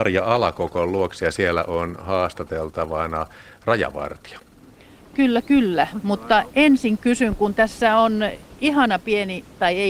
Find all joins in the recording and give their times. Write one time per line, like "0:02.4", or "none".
none